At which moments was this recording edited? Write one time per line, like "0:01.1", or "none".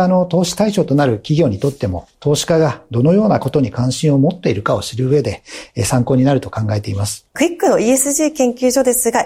0:07.3